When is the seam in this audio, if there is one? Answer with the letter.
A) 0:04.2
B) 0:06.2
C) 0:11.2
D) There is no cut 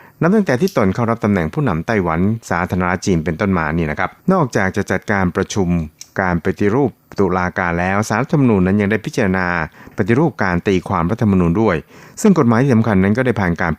A